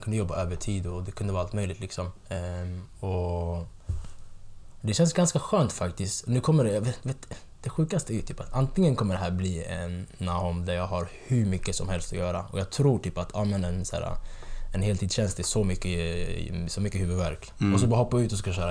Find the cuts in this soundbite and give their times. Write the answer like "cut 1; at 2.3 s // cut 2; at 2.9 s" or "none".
none